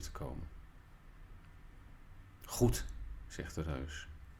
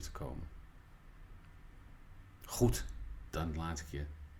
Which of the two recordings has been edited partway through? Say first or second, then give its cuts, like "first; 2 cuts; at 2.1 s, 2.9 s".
second; 1 cut; at 3.3 s